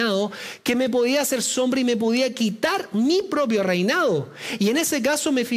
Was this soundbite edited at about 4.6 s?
no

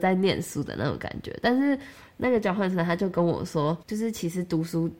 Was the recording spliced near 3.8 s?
yes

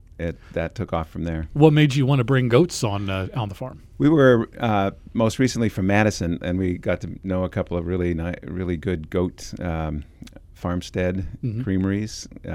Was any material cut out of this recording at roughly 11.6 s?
no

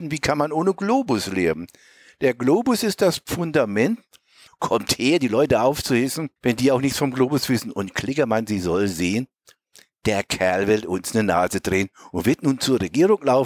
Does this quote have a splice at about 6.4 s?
yes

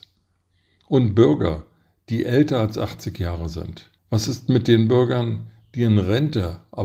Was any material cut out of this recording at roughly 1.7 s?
no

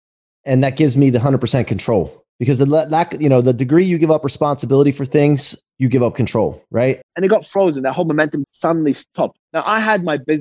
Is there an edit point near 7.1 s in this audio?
yes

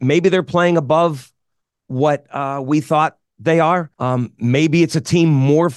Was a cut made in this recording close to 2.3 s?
no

